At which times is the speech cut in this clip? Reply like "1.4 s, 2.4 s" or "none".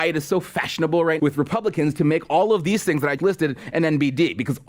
1.2 s, 3.2 s